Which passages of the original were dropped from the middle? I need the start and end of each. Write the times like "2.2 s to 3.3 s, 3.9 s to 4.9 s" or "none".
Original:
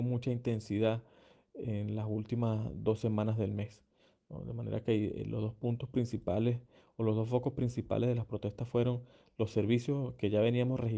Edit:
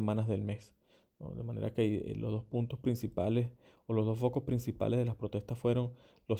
none